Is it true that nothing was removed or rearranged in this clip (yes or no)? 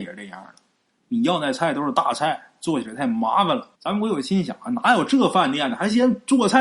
no